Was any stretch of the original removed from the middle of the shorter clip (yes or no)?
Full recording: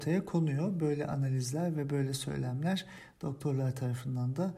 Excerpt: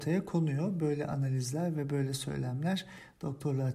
no